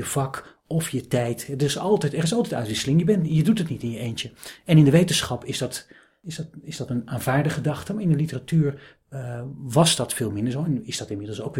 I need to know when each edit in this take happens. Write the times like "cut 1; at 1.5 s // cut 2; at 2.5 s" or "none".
none